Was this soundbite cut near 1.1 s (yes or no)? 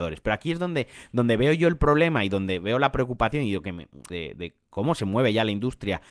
no